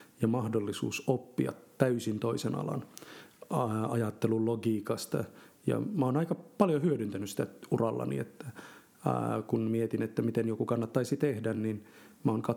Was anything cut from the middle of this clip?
no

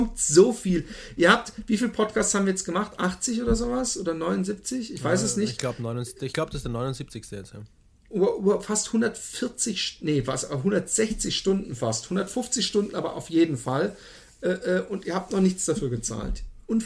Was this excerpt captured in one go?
yes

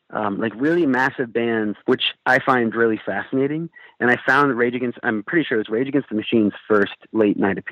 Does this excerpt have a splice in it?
yes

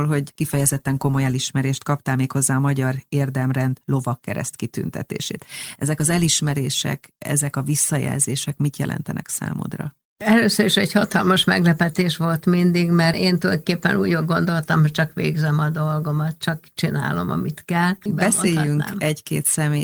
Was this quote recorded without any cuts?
no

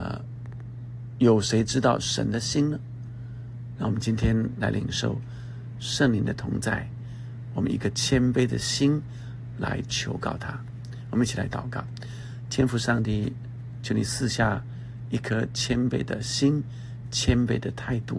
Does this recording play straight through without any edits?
no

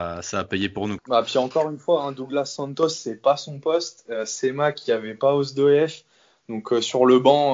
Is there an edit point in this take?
yes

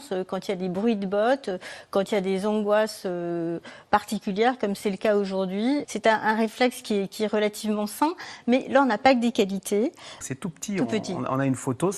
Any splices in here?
yes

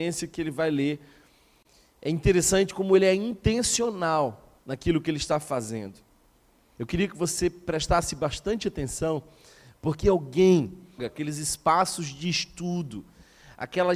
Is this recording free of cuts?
no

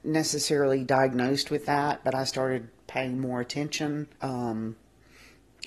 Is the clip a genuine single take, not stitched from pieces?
no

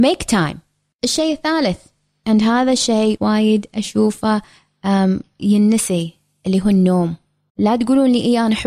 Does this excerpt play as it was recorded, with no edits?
no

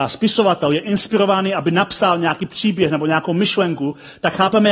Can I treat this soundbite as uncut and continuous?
yes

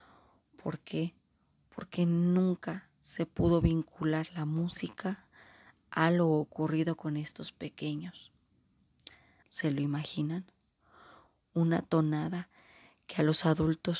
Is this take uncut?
no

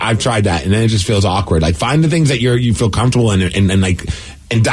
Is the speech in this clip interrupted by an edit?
no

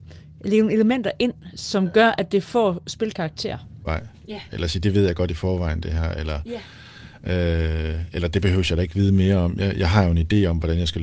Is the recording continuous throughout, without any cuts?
no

